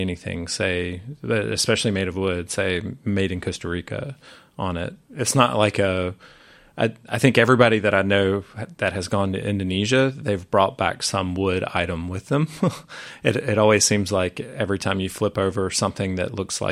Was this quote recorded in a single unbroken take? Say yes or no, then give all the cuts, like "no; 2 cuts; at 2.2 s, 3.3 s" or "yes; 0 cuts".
no; 1 cut; at 5.0 s